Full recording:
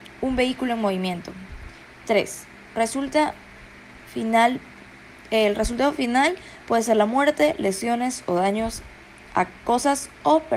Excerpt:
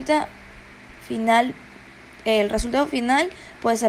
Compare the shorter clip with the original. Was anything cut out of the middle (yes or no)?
no